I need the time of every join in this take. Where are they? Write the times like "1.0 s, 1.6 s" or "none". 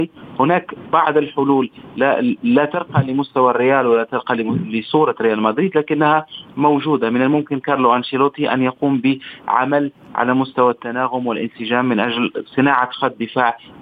none

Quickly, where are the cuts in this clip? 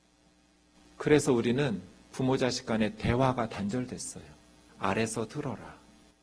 4.7 s

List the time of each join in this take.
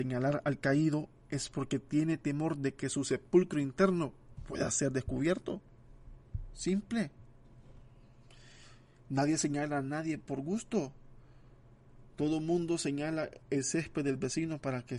none

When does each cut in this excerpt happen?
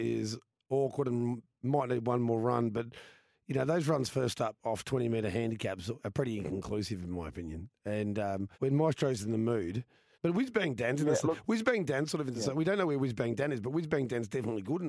6.0 s, 8.5 s, 10.1 s

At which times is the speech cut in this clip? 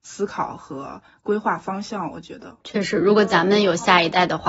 2.6 s

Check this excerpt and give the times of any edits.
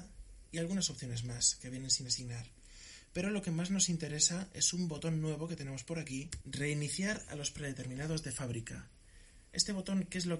6.4 s

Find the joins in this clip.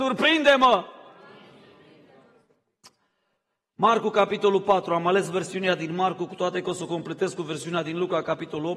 none

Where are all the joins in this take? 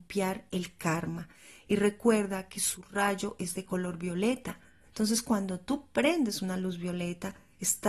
none

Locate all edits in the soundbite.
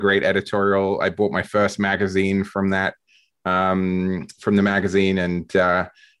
none

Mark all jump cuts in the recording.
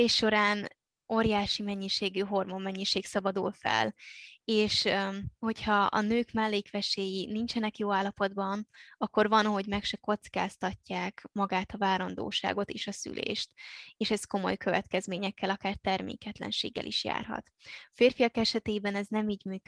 none

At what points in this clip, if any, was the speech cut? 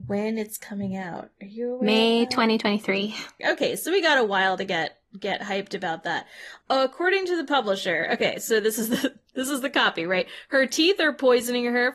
3.4 s

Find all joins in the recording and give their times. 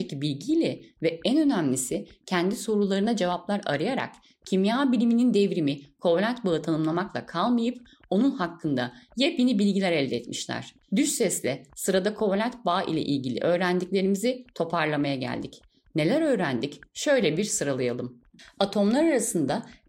none

